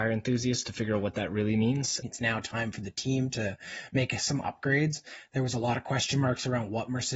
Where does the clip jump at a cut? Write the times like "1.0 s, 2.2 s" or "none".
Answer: 2.0 s